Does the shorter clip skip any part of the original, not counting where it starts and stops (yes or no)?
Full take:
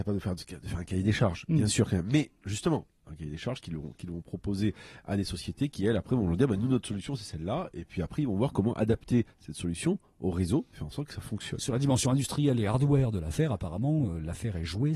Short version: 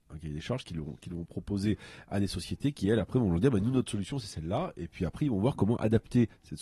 no